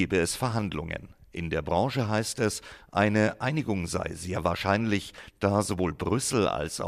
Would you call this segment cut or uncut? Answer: uncut